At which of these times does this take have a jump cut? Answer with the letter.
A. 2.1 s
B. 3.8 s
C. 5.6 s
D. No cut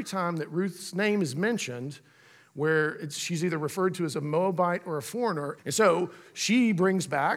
C